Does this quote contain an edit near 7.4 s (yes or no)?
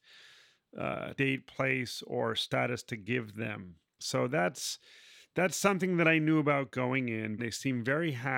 yes